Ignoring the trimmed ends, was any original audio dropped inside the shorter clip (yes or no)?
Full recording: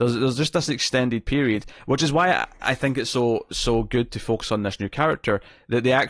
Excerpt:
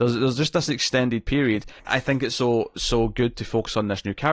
yes